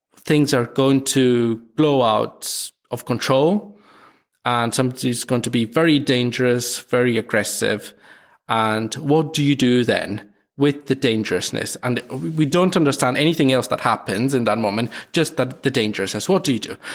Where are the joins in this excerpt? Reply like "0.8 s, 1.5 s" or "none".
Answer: none